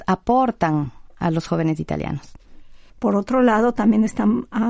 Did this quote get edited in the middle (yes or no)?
yes